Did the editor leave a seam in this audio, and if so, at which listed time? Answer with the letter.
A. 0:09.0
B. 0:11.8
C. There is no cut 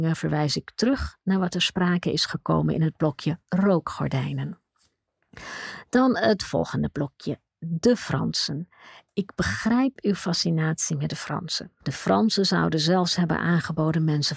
B